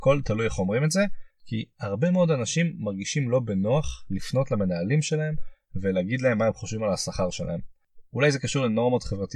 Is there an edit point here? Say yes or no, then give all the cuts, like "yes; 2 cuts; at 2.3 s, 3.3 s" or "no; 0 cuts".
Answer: yes; 1 cut; at 1.3 s